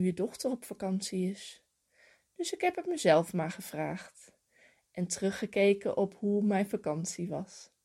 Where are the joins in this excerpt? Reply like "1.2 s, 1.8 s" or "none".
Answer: none